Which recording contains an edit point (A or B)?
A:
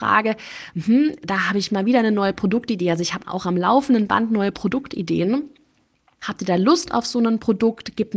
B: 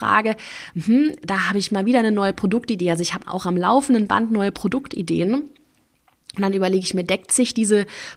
A